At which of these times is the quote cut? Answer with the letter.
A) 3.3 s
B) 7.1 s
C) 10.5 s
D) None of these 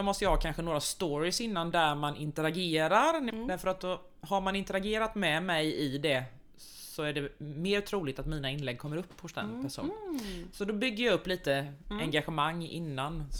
A